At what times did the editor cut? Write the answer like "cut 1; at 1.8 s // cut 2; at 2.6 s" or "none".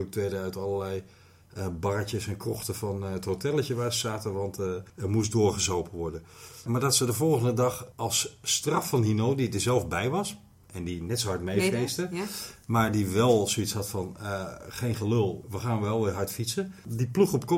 none